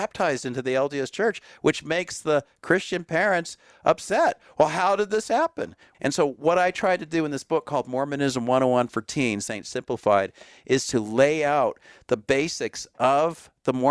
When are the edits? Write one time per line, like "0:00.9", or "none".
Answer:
0:05.9
0:09.5